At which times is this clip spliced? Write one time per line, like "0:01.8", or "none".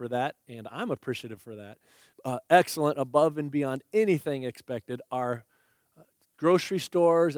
0:02.1